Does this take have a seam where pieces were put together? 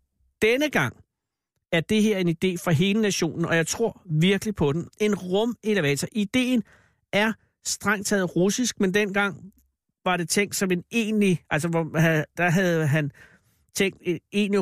no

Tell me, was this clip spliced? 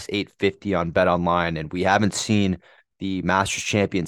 no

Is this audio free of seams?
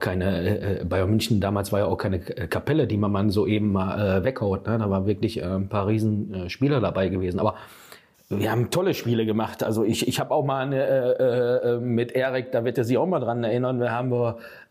yes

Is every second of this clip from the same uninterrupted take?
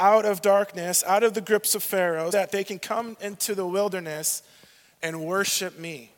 no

